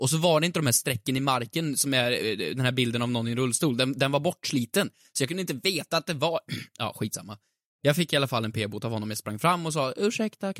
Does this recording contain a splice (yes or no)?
no